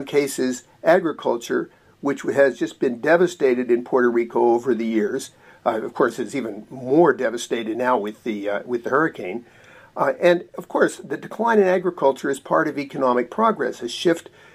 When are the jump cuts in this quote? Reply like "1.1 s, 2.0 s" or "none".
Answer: none